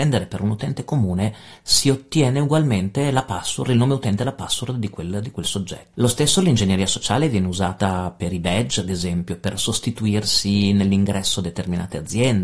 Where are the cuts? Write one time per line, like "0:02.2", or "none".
0:05.9

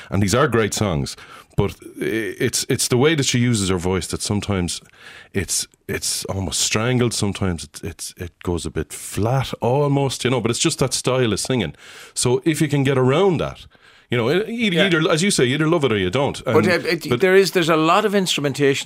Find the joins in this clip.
none

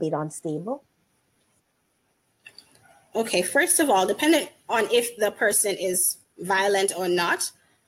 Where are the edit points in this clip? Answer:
none

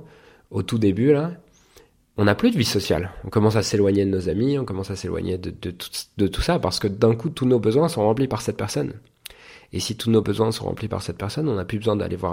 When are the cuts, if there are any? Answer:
none

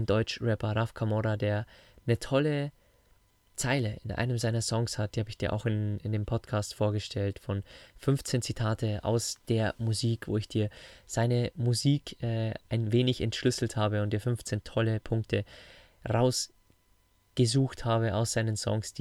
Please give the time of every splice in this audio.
none

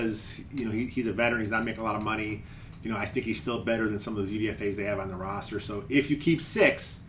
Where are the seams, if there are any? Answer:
none

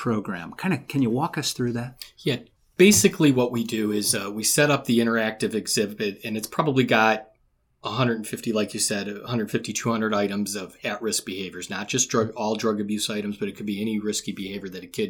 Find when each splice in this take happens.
none

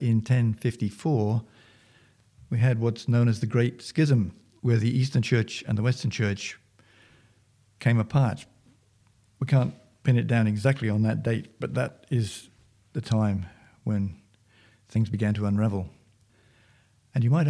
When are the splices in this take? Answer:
none

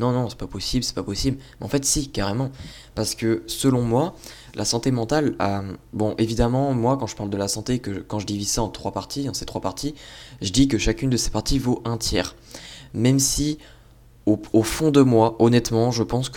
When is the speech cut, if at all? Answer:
none

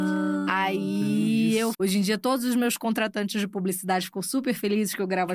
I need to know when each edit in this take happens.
0:01.7

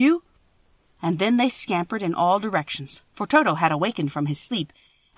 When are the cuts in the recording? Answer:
0:00.9

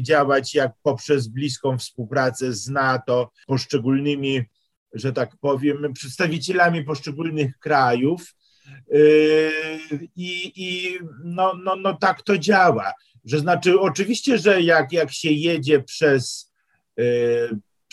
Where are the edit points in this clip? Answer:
none

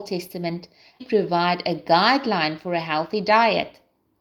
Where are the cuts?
0:01.0

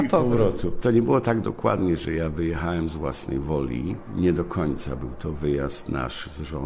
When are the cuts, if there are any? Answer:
none

